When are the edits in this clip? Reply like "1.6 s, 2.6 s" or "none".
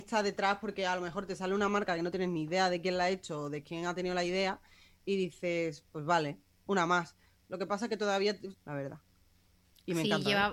7.4 s, 8.6 s